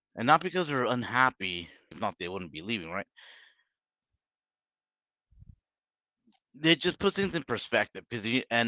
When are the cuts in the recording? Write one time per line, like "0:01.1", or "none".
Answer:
0:01.9